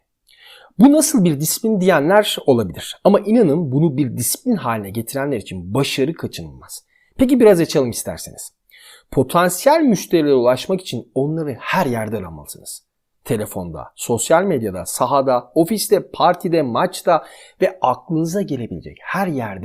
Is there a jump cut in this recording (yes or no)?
no